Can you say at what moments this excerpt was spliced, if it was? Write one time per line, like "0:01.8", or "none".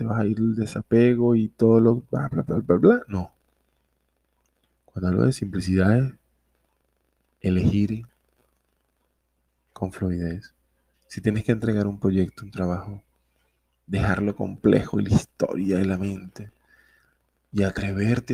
none